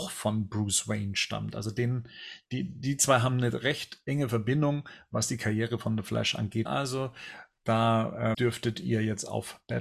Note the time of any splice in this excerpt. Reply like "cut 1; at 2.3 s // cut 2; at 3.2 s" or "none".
cut 1; at 6.7 s // cut 2; at 8.3 s